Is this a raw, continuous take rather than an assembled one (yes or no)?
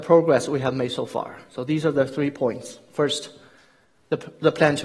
yes